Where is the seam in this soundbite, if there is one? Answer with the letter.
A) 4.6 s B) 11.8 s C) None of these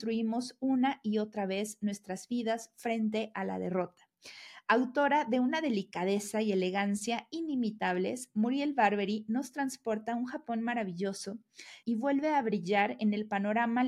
B